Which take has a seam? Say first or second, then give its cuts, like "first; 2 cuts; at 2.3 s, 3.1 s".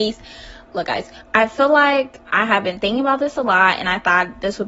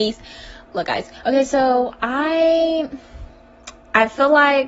first; 1 cut; at 1.2 s